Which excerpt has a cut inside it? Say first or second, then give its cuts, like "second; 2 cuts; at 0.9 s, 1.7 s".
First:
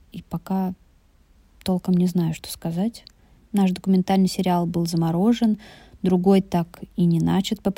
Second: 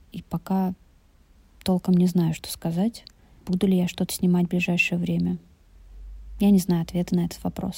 first; 1 cut; at 3.4 s